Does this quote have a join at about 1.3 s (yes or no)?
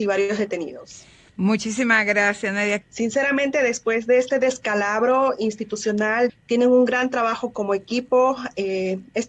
no